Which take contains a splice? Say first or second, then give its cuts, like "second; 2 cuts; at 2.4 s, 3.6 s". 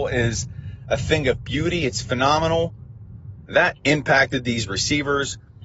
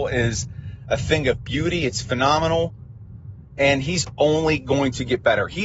first; 1 cut; at 3.4 s